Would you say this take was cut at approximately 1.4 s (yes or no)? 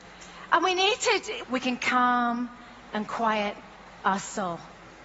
yes